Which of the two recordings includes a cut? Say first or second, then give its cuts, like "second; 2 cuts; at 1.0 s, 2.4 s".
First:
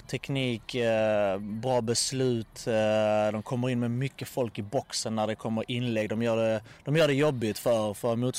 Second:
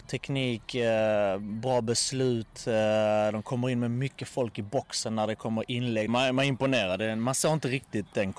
second; 1 cut; at 6.1 s